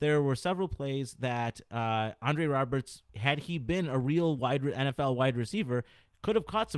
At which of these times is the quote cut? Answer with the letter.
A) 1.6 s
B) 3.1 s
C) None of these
B